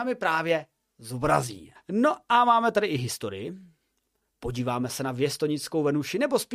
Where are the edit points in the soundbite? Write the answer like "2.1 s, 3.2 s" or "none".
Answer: 1.8 s